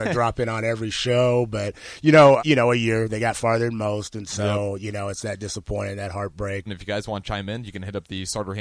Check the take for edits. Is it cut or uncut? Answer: cut